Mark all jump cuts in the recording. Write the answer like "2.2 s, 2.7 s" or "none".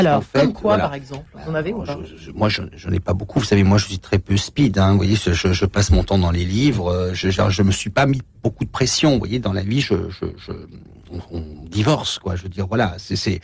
9.8 s